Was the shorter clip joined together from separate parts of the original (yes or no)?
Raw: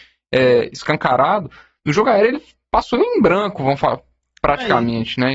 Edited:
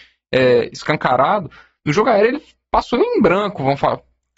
no